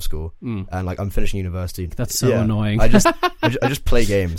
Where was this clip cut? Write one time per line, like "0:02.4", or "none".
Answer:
0:01.9
0:03.0